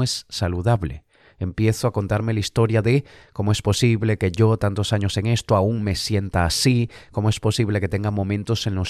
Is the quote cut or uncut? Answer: uncut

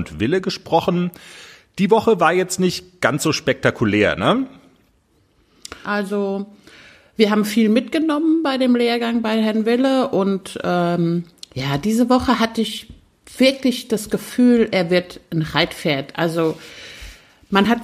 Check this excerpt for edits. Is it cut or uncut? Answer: cut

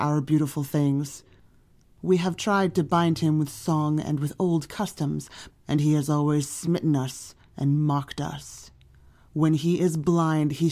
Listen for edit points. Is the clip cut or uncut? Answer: cut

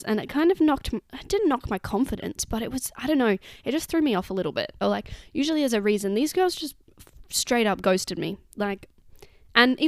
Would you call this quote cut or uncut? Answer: cut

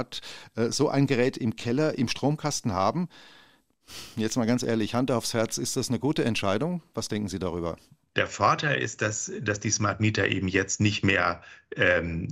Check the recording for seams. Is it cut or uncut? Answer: uncut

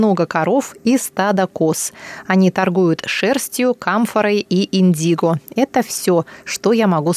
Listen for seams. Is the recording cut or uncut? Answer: uncut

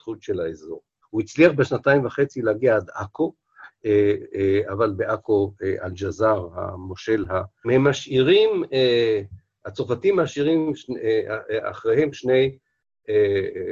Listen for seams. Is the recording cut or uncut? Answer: cut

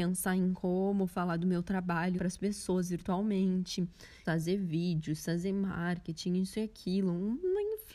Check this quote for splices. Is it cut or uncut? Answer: cut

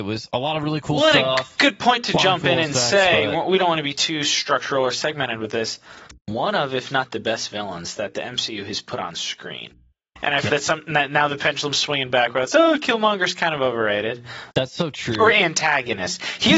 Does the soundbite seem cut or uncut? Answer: cut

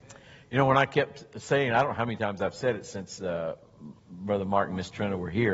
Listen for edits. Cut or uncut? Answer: uncut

